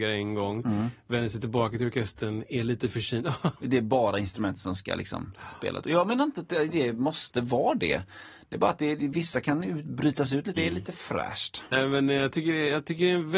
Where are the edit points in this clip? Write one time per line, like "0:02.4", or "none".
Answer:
0:03.5
0:10.6
0:11.7

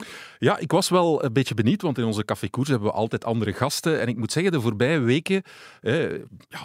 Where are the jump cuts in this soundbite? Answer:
none

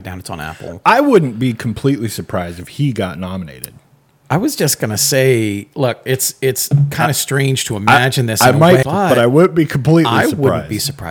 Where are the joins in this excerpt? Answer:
0:08.8

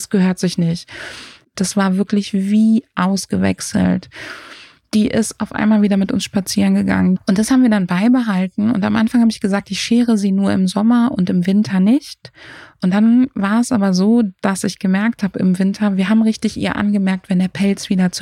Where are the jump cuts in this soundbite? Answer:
0:01.5
0:07.2

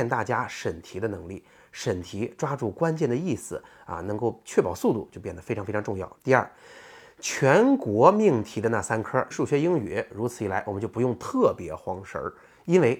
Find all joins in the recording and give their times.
0:06.2
0:09.3

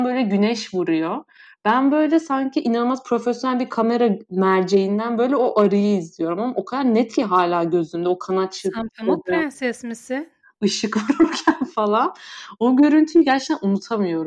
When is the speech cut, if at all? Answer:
none

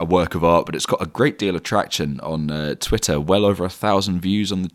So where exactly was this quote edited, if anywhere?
none

